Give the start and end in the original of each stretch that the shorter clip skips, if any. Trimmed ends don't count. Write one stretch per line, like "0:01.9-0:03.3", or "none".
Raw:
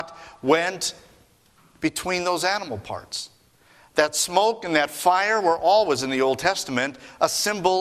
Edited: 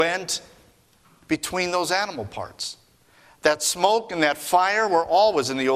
none